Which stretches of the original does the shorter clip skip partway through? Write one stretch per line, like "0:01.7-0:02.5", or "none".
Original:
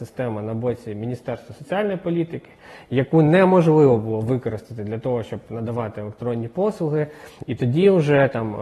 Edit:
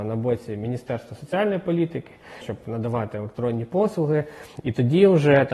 0:02.8-0:05.2